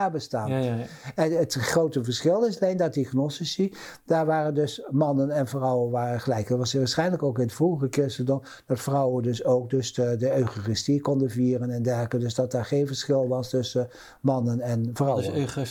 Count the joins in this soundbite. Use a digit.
0